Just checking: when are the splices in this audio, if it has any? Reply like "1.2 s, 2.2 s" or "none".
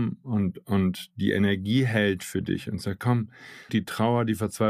3.7 s